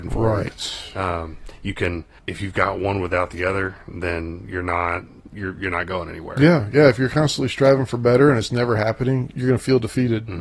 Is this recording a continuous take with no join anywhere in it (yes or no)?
no